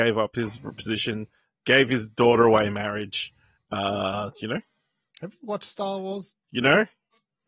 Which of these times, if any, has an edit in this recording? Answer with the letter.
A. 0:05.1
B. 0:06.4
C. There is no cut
B